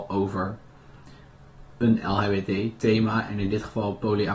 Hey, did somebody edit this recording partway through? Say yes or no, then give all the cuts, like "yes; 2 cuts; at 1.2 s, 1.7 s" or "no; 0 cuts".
no; 0 cuts